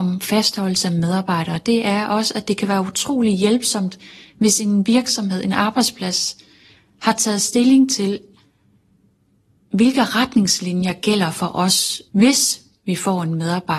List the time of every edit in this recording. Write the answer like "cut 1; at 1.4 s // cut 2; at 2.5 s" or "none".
none